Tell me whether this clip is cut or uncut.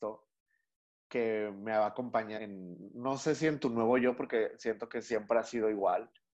cut